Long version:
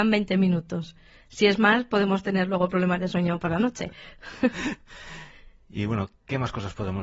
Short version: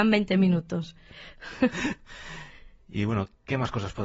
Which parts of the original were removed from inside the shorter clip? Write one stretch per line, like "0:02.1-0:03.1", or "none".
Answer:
0:01.1-0:03.9